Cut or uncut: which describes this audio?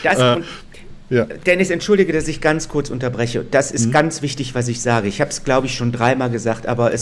uncut